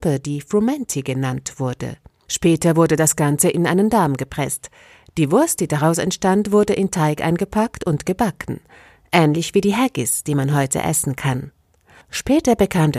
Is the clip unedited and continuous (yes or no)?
yes